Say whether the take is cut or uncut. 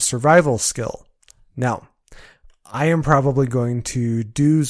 uncut